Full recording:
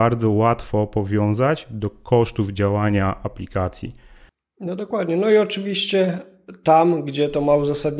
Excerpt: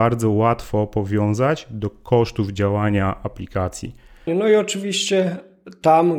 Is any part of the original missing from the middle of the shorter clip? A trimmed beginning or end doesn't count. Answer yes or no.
yes